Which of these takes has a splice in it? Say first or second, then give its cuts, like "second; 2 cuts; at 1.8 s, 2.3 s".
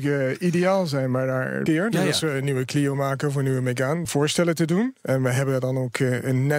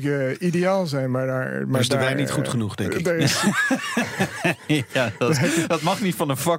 first; 2 cuts; at 1.7 s, 4.1 s